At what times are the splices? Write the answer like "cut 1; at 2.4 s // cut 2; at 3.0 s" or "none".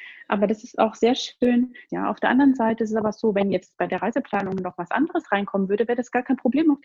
cut 1; at 1.9 s